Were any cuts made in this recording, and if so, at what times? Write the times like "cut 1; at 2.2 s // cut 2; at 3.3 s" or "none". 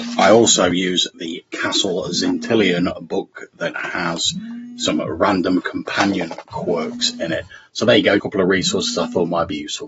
cut 1; at 8.2 s